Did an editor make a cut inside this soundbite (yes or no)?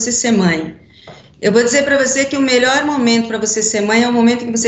no